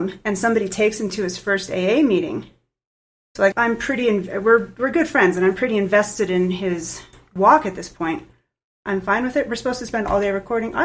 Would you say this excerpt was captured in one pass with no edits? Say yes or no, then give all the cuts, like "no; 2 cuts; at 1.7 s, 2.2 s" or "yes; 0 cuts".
no; 2 cuts; at 3.5 s, 8.8 s